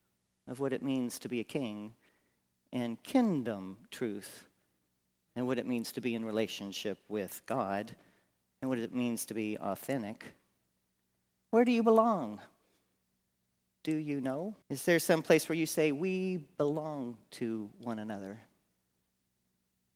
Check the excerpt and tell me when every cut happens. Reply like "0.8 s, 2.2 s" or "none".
5.3 s, 14.6 s